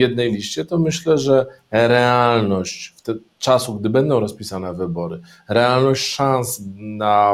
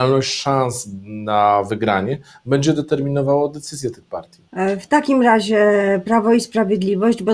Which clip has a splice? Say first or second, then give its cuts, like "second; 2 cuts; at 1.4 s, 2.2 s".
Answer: second; 1 cut; at 4.5 s